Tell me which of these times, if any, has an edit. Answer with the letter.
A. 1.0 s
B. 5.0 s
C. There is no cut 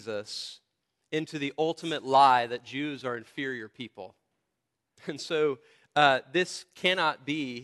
B